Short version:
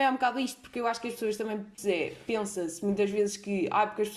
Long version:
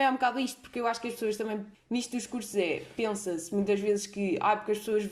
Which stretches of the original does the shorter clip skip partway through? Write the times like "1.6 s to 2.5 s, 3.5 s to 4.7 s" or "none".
1.8 s to 2.5 s